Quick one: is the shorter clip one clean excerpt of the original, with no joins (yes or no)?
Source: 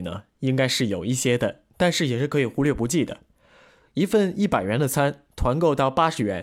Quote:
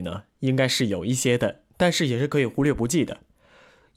yes